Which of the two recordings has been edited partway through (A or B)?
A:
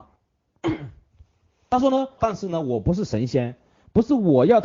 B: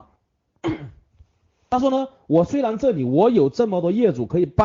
A